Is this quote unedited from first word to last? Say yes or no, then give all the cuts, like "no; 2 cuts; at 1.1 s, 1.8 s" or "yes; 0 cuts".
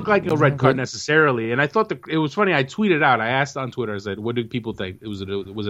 yes; 0 cuts